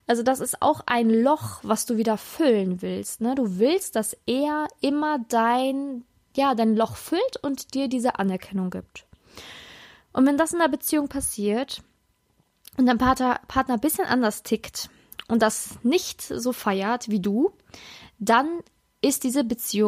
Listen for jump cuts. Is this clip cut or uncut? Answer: uncut